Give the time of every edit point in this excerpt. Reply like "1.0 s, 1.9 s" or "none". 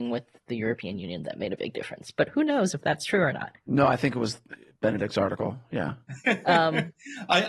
none